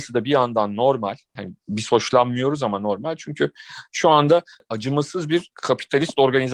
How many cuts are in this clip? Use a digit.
1